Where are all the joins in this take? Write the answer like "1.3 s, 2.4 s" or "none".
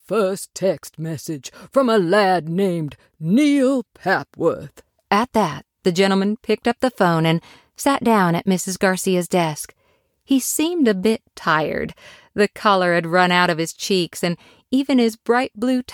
none